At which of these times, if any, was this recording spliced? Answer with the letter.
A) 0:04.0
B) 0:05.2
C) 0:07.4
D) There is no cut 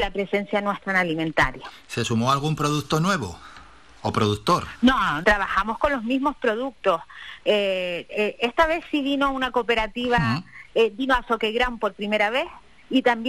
B